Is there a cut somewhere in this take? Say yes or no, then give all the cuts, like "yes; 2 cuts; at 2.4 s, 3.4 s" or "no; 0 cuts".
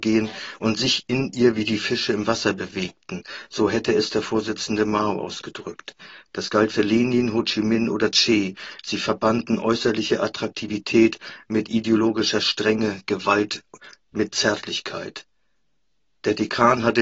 no; 0 cuts